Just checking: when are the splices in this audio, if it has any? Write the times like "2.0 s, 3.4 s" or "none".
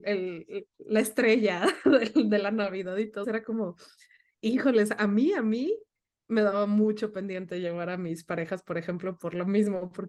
3.2 s